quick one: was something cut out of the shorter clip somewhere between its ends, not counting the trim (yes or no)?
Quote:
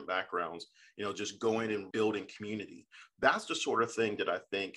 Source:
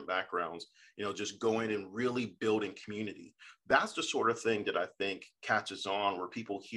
yes